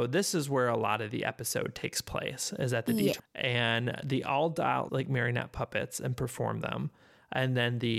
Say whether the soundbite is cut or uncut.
cut